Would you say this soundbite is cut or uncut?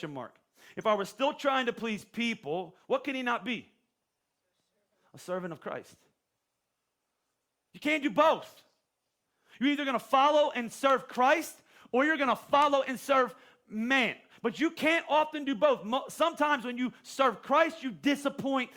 uncut